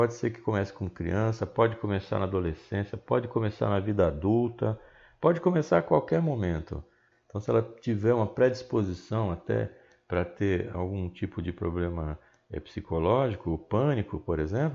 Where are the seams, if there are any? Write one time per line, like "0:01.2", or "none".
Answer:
0:07.1